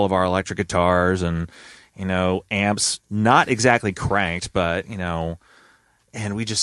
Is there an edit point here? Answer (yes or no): no